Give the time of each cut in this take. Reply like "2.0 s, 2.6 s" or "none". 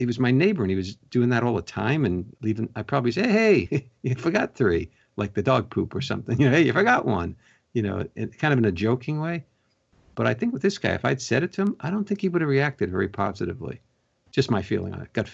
none